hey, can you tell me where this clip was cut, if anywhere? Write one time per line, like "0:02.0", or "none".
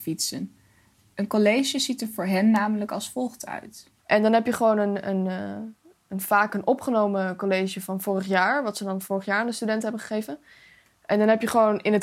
0:04.0